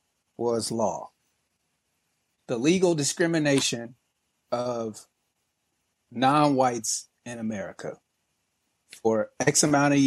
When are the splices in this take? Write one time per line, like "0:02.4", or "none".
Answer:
none